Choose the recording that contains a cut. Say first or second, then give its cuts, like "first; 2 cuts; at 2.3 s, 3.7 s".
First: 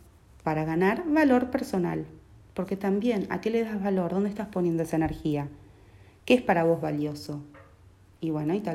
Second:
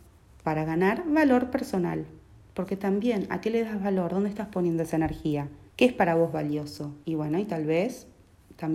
second; 2 cuts; at 5.7 s, 7.0 s